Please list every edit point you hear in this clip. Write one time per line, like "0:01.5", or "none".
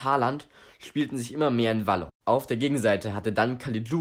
none